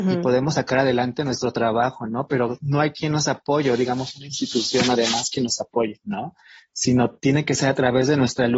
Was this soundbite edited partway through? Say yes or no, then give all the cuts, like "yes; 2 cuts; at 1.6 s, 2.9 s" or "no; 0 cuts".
no; 0 cuts